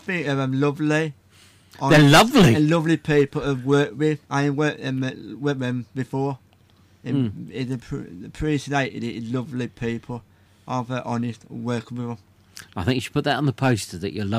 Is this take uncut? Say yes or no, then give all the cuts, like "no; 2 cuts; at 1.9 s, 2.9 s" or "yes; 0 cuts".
no; 1 cut; at 4.3 s